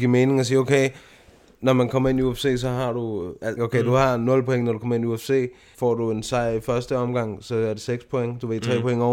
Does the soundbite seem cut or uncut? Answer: cut